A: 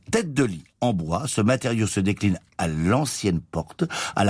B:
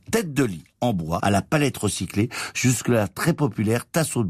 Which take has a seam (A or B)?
B